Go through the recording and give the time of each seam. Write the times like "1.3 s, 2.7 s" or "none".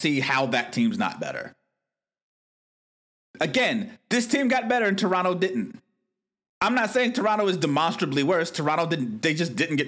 none